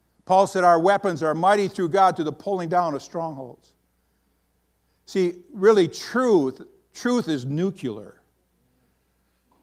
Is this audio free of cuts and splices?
yes; 0 cuts

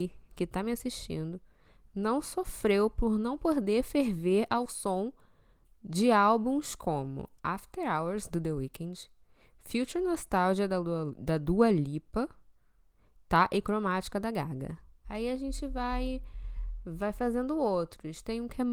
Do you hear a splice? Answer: yes; 1 cut; at 15.0 s

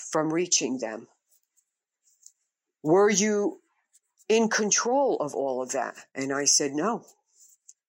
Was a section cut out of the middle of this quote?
no; 0 cuts

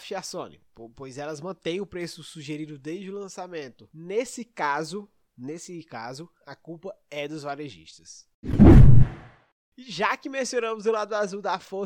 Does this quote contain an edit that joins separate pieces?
no; 0 cuts

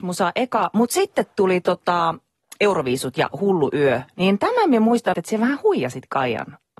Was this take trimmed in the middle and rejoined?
yes; 1 cut; at 5.1 s

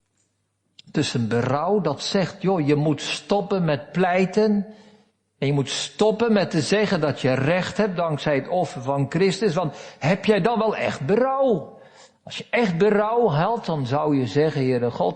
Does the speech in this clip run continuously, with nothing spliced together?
yes; 0 cuts

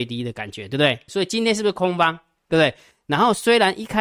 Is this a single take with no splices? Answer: no; 2 cuts; at 1.1 s, 2.9 s

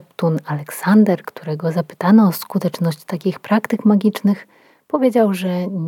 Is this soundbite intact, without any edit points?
yes; 0 cuts

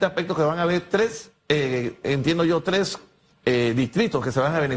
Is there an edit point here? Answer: no; 0 cuts

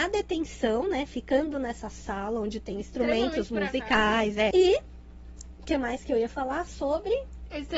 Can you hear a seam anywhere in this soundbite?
yes; 1 cut; at 4.5 s

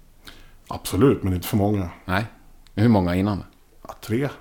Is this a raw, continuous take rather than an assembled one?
yes; 0 cuts

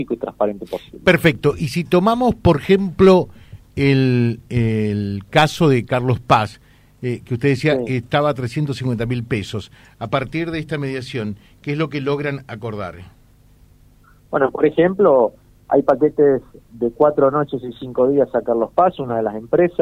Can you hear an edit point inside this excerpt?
no; 0 cuts

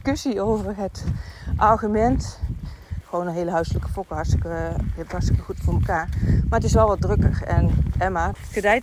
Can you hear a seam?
yes; 1 cut; at 3.0 s

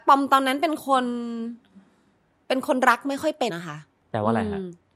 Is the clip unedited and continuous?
no; 1 cut; at 3.5 s

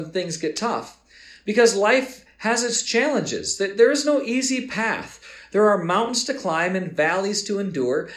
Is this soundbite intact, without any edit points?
yes; 0 cuts

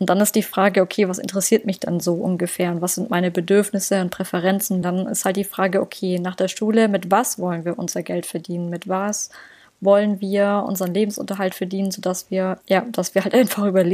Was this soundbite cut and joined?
yes; 2 cuts; at 4.8 s, 12.6 s

